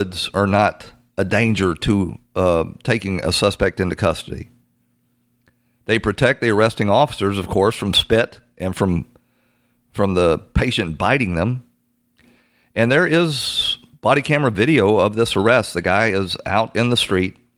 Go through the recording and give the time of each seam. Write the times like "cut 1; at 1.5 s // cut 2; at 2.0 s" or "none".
none